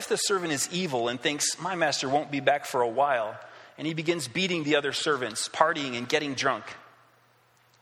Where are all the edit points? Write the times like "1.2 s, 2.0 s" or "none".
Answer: none